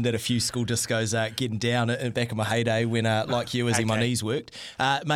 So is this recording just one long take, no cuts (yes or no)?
yes